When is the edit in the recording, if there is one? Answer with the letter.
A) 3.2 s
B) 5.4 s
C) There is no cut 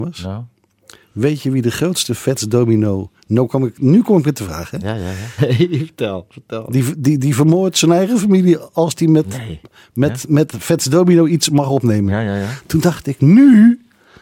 B